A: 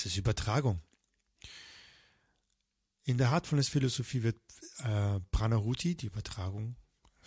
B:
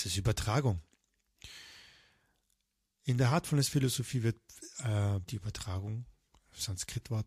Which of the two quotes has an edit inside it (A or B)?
B